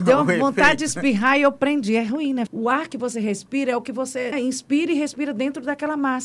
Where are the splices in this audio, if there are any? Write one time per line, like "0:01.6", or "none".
0:02.5
0:04.3